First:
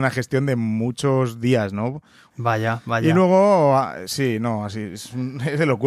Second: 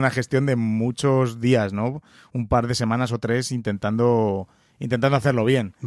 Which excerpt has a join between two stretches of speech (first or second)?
first